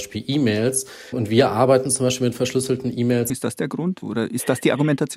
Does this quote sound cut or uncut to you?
cut